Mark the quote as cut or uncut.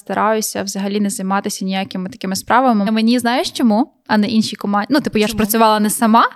cut